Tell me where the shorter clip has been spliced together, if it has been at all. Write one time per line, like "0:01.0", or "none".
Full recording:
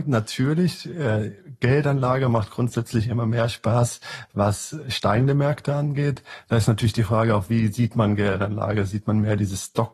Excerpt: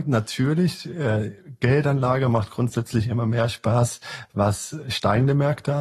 none